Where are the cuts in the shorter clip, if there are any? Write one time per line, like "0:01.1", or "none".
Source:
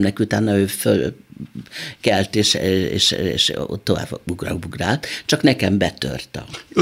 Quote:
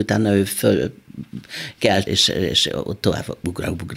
0:02.1